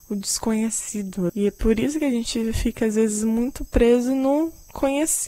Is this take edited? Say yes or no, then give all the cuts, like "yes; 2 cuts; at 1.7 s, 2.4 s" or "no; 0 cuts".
yes; 1 cut; at 1.3 s